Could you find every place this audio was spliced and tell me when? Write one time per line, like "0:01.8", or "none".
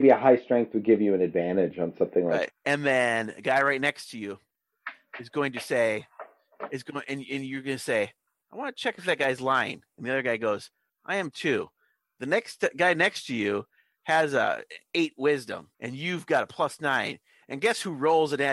0:02.5
0:15.7